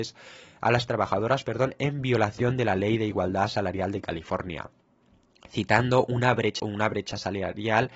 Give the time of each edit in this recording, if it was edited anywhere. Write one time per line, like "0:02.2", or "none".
0:06.6